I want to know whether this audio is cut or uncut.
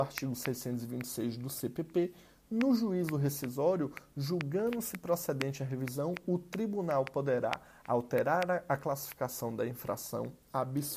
uncut